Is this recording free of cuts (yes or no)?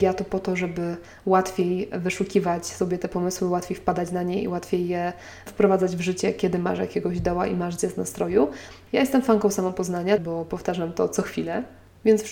no